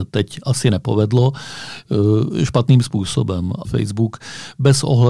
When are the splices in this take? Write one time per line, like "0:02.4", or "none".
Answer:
0:03.6